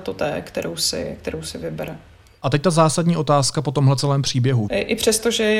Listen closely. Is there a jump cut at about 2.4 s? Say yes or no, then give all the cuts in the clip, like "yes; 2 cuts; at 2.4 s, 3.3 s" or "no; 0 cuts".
no; 1 cut; at 4.7 s